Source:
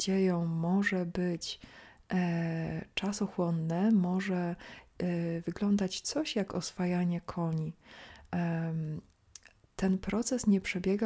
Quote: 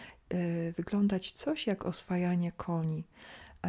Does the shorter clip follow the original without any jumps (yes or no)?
yes